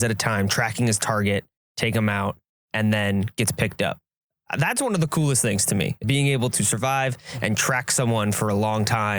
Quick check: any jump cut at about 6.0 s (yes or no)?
yes